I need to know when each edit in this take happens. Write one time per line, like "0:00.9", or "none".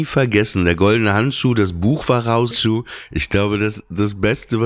0:02.5